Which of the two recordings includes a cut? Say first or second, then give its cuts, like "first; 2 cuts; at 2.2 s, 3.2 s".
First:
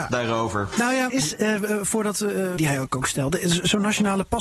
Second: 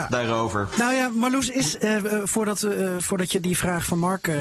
first; 2 cuts; at 1.1 s, 2.6 s